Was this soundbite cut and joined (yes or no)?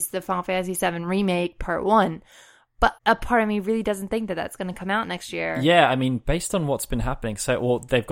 yes